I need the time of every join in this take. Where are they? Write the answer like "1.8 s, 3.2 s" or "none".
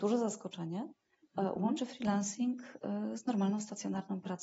none